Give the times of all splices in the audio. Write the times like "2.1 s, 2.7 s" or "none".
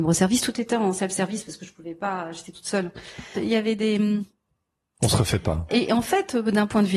3.3 s, 5.7 s